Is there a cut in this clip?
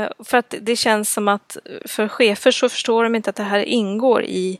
yes; 1 cut; at 1.8 s

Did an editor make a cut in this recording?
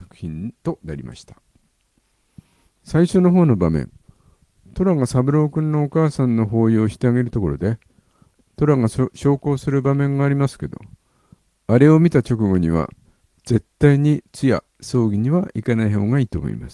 no; 0 cuts

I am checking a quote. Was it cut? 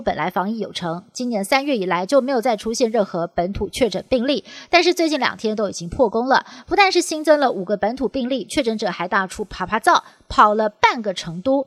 no; 0 cuts

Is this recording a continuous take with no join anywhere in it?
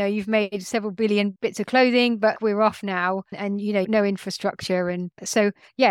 no; 2 cuts; at 2.3 s, 3.8 s

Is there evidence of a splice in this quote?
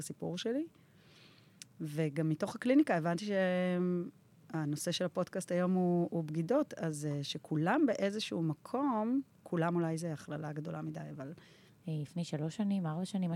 yes; 1 cut; at 11.7 s

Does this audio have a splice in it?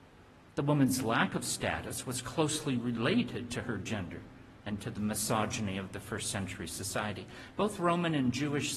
no; 0 cuts

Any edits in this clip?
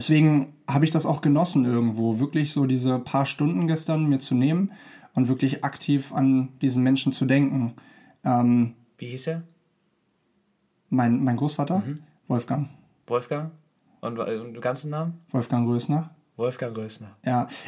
no; 0 cuts

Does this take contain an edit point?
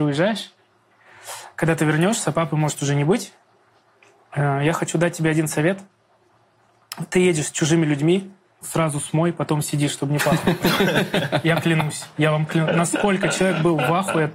yes; 1 cut; at 8.6 s

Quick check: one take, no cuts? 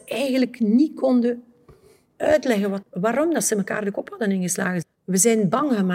no; 2 cuts; at 2.8 s, 4.8 s

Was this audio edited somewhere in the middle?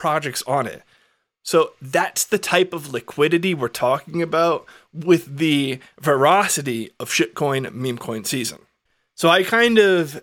no; 0 cuts

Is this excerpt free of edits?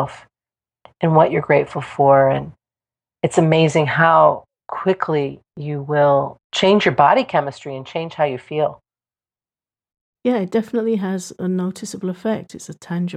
yes; 0 cuts

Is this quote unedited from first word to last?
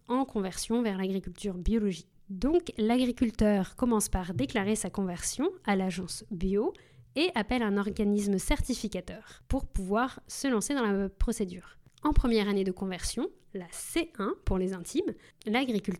no; 1 cut; at 2.1 s

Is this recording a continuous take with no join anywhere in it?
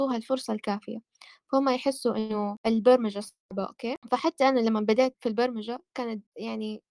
no; 1 cut; at 5.1 s

